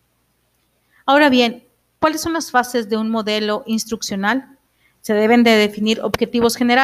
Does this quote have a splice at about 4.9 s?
yes; 1 cut; at 4.9 s

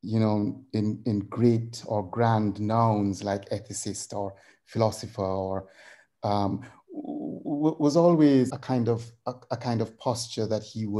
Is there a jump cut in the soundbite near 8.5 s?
yes; 1 cut; at 8.5 s

